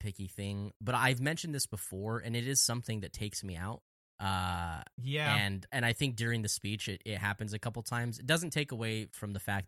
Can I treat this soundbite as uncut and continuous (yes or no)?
no